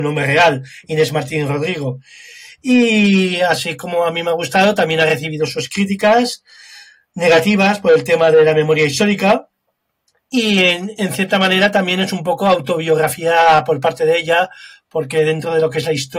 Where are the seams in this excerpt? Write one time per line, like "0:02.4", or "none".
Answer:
none